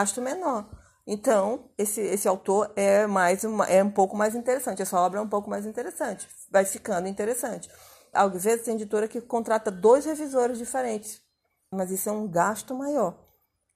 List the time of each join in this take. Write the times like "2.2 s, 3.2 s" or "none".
8.1 s, 11.7 s